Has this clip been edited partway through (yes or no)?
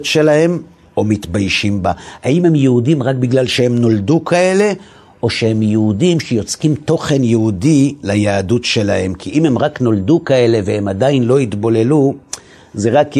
no